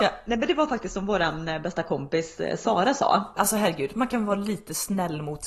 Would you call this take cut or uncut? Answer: cut